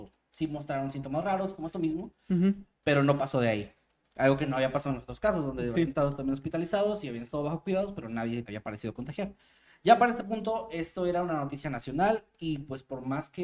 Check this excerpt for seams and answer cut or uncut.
cut